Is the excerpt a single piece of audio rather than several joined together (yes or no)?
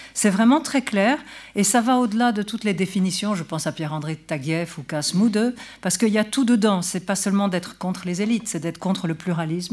yes